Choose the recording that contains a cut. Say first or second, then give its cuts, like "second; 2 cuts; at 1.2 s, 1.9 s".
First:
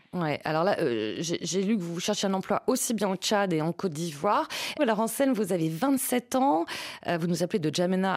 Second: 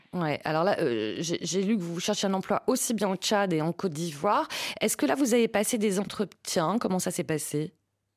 first; 1 cut; at 4.8 s